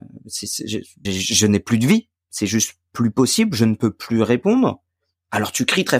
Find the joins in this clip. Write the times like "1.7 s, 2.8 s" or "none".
1.1 s

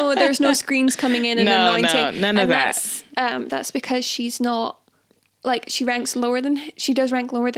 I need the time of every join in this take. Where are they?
3.5 s

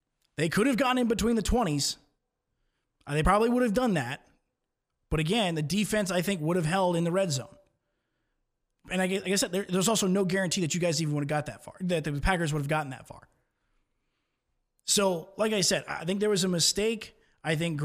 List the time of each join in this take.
none

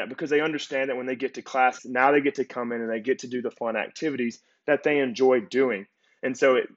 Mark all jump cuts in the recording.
1.8 s

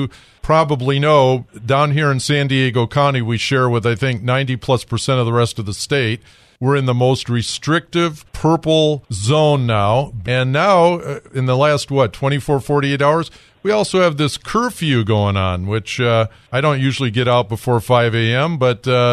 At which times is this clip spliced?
10.2 s

